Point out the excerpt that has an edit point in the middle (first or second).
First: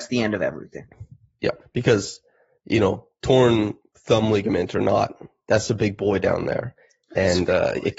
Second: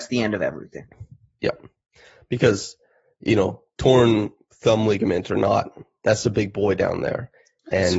first